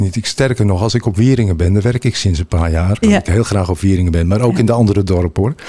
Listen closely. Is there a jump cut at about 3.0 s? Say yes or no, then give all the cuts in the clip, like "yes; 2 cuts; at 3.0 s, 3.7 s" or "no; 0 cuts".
yes; 1 cut; at 3.0 s